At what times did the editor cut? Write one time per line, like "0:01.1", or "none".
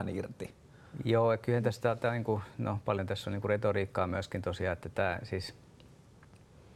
none